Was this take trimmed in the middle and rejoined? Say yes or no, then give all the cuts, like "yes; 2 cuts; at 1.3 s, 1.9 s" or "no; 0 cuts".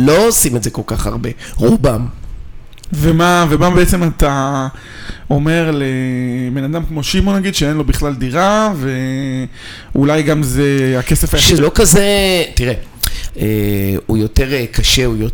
yes; 2 cuts; at 11.6 s, 13.3 s